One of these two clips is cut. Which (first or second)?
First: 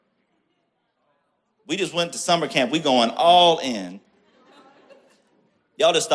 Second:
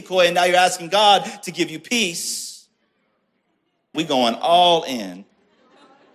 second